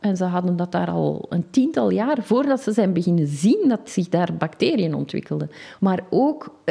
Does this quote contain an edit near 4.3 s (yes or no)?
no